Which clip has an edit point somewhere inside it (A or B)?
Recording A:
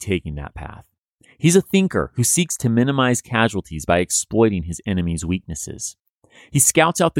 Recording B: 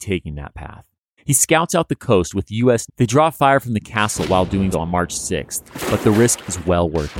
B